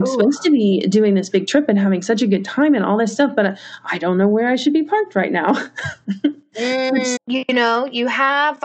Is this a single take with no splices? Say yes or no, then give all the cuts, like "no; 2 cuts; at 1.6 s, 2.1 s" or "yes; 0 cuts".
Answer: no; 1 cut; at 7.2 s